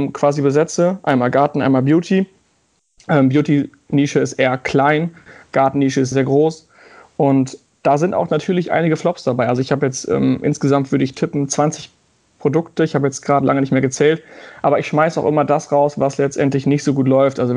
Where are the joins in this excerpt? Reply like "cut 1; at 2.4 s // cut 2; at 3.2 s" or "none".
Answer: cut 1; at 6.1 s